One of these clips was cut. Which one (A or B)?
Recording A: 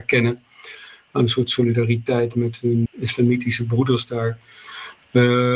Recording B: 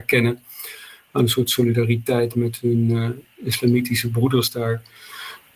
A